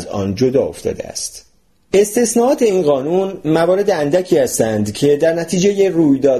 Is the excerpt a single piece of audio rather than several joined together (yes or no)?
no